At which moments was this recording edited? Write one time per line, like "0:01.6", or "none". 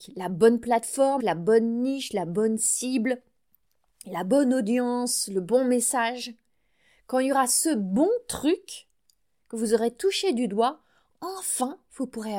0:01.2